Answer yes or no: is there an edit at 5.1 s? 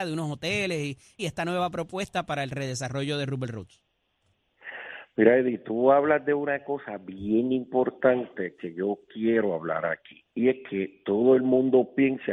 no